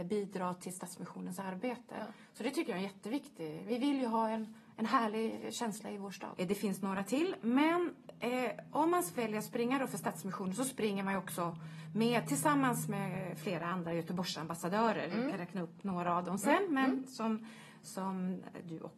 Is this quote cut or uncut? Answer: cut